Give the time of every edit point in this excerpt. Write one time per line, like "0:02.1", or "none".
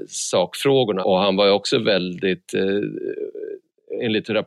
0:01.0